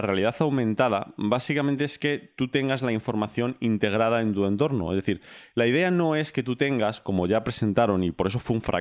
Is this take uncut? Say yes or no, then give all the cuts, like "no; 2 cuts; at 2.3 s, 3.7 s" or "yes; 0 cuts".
yes; 0 cuts